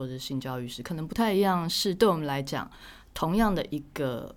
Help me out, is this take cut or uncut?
uncut